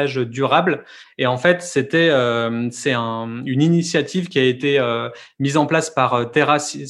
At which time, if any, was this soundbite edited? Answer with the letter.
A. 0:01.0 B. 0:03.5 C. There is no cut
A